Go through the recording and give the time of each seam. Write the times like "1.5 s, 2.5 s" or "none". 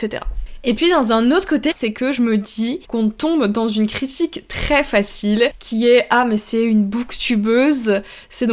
1.7 s, 2.8 s